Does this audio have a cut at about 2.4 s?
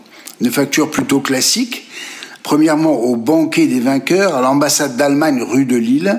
yes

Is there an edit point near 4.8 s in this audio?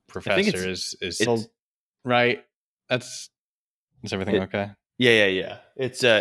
no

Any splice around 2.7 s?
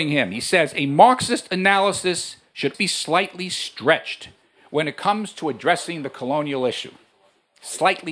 yes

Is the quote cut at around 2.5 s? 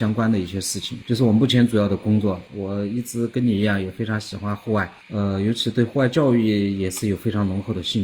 yes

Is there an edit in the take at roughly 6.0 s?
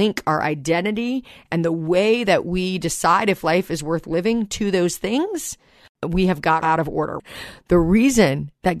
no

